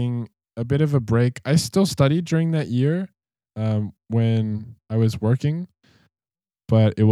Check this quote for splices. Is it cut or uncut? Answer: uncut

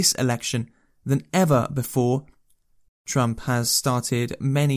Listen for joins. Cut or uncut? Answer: cut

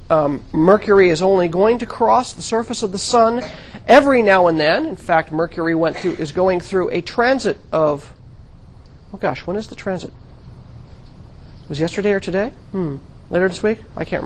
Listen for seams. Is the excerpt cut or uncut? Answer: uncut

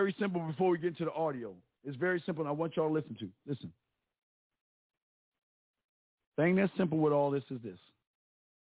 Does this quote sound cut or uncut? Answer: uncut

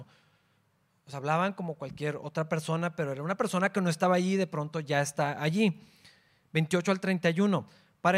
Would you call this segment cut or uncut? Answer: uncut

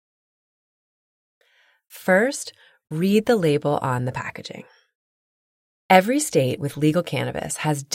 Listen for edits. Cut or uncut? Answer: uncut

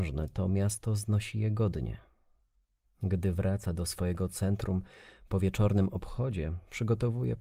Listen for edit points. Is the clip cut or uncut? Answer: cut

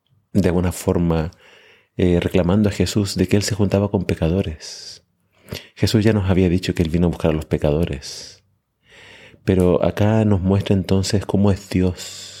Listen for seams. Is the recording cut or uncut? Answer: uncut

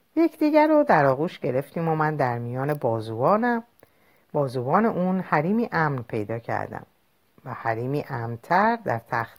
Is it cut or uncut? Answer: uncut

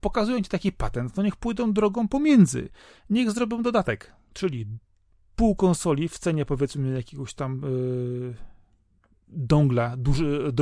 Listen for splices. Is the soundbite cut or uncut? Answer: uncut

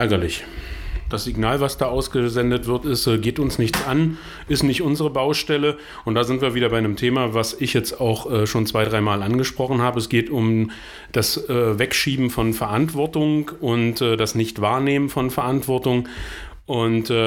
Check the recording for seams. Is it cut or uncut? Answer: cut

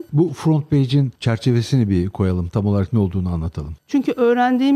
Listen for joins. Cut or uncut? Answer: cut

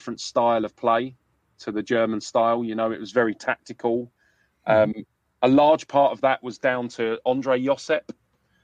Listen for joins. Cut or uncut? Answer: uncut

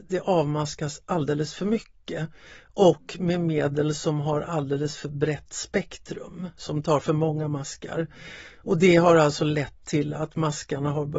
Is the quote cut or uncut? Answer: uncut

